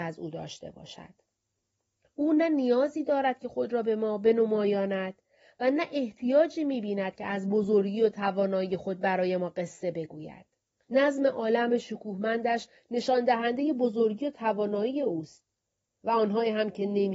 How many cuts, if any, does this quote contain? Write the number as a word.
one